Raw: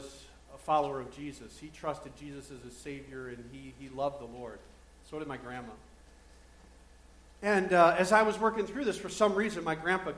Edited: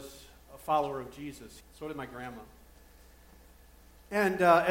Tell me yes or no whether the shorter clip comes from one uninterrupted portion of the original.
no